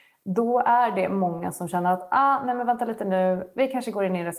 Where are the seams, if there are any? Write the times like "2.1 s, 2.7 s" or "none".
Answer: none